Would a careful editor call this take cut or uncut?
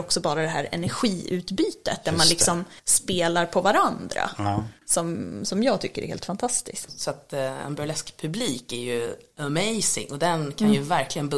cut